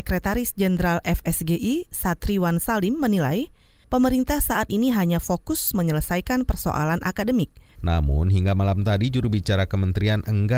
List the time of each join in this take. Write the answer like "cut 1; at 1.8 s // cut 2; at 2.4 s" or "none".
cut 1; at 7.8 s